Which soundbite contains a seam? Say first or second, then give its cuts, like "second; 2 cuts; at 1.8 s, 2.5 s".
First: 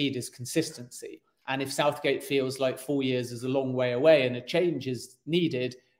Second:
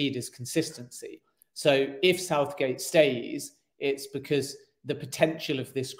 first; 1 cut; at 1.4 s